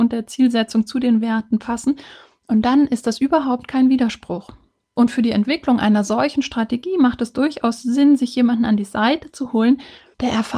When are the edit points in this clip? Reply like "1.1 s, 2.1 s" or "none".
none